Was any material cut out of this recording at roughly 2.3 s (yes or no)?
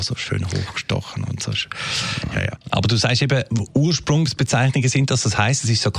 no